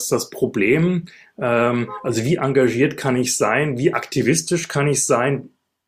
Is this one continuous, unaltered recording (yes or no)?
yes